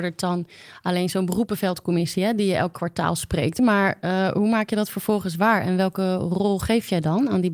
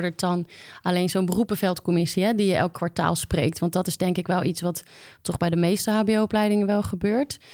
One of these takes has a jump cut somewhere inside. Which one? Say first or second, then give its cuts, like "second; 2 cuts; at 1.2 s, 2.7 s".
first; 1 cut; at 3.6 s